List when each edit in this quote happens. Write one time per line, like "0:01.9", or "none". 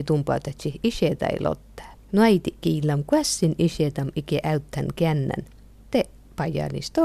0:02.0